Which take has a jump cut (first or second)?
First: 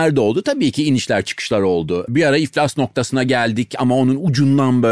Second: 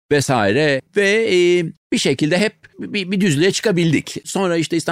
second